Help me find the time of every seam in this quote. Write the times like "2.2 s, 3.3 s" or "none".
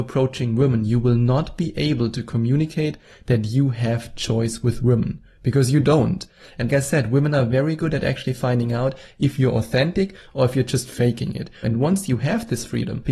6.7 s, 11.6 s